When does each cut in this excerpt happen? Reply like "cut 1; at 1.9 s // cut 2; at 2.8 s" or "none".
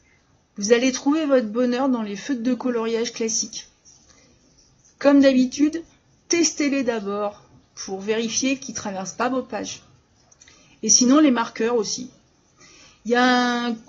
none